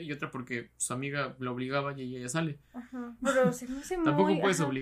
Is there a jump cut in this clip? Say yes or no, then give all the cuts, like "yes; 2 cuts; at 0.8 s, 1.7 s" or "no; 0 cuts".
yes; 1 cut; at 3.2 s